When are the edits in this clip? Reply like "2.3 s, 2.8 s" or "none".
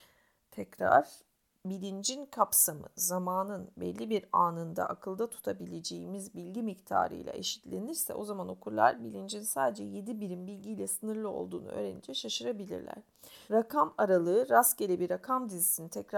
13.5 s